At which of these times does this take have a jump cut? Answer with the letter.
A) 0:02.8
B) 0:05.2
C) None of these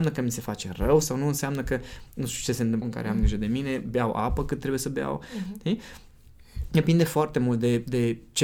A